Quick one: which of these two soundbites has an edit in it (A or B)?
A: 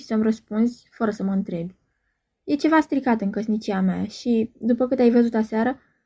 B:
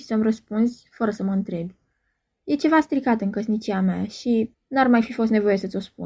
B